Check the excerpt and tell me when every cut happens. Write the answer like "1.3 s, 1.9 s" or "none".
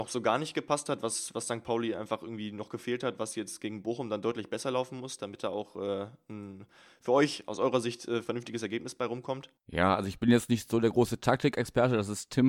9.6 s